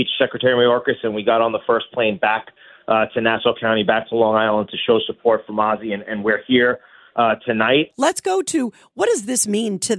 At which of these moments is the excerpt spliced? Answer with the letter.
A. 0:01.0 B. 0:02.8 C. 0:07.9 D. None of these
C